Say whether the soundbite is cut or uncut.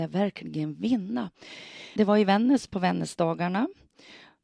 cut